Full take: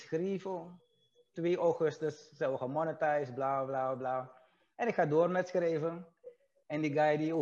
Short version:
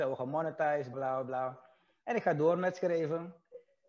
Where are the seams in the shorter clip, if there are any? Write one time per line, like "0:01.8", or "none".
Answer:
0:00.9